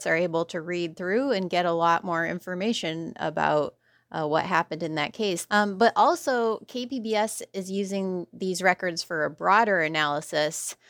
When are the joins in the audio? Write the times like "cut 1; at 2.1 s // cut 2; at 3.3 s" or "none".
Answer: cut 1; at 5.5 s